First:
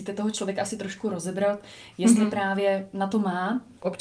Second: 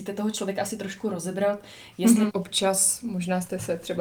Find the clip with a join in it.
second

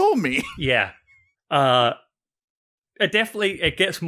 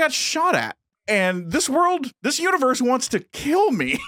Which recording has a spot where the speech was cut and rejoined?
second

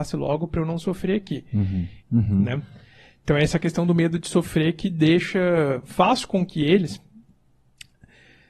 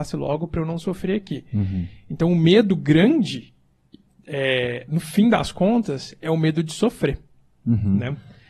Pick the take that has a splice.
first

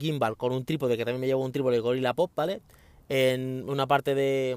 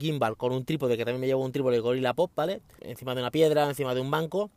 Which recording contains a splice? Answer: second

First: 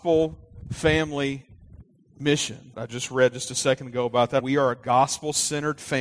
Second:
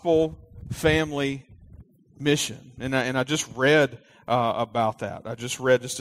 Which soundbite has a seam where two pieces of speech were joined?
first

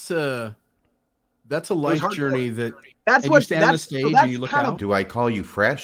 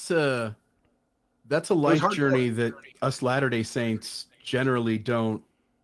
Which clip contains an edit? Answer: first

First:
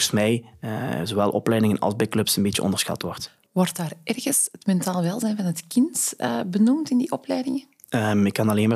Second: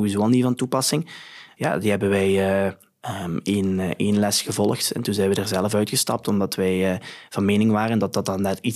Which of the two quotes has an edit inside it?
second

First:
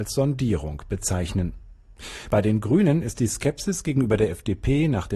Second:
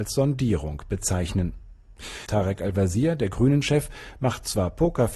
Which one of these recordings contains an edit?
second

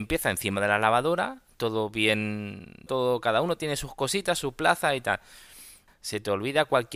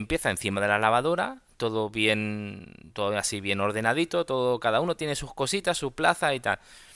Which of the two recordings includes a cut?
first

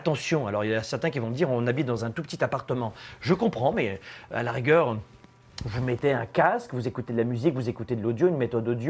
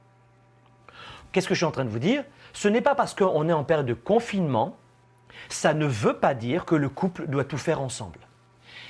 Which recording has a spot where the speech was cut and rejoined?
second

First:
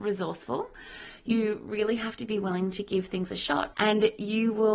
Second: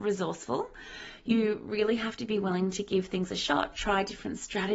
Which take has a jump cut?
first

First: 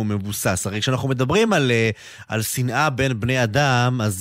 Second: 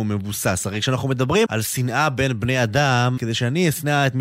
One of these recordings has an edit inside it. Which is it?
second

